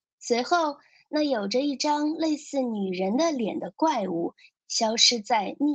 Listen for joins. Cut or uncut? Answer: cut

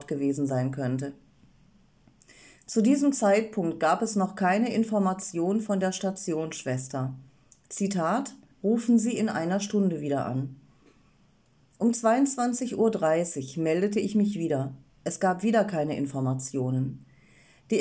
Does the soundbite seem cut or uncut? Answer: cut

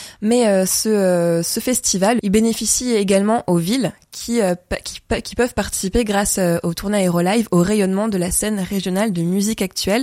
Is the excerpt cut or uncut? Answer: cut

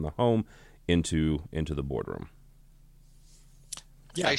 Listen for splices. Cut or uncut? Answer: uncut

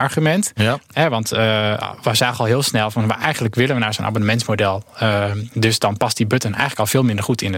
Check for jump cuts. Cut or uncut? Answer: uncut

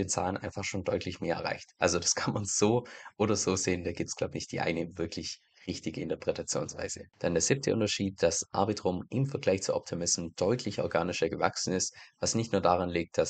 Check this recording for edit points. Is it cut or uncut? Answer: uncut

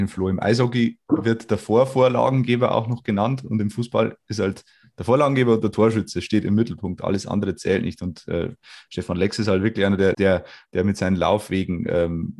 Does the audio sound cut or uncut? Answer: cut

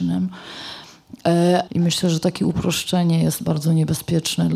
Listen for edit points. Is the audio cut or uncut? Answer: cut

